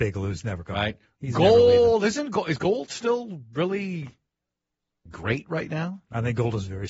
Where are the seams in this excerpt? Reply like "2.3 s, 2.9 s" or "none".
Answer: 5.1 s